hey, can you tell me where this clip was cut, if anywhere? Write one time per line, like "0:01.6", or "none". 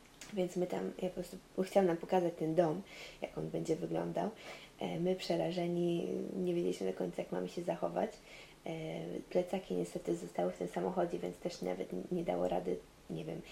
none